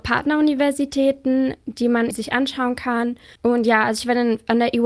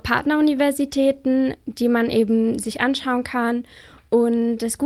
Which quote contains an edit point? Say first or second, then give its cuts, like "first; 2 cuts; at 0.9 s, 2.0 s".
first; 2 cuts; at 2.1 s, 3.4 s